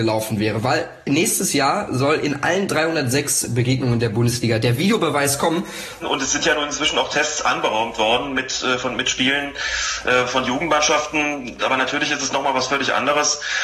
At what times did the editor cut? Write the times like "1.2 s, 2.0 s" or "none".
6.0 s, 11.6 s